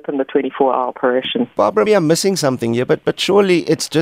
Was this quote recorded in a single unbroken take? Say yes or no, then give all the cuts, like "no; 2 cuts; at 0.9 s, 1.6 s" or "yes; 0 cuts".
no; 1 cut; at 1.9 s